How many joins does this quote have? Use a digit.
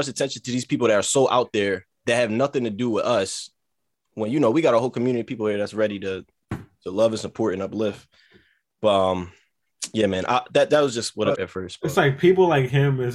1